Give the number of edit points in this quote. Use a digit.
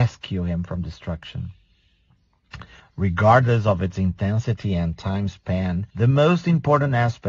2